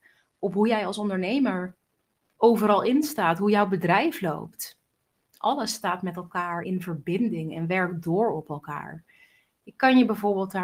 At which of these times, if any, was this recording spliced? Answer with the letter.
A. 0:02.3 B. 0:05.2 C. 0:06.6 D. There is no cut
C